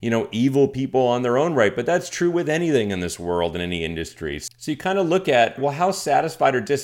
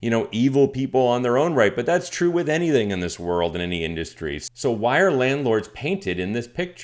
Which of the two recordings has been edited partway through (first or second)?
first